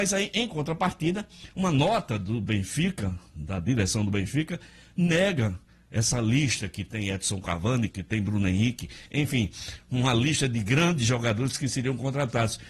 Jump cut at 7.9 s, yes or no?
yes